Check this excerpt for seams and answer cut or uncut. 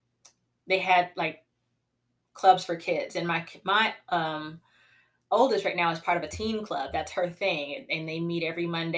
uncut